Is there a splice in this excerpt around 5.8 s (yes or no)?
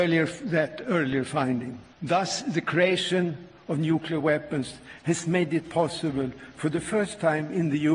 no